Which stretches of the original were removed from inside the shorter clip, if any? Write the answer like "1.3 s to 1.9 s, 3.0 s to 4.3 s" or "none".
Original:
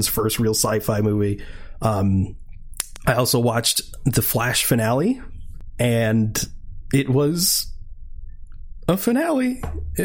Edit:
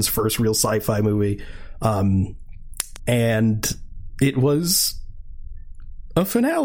3.0 s to 5.7 s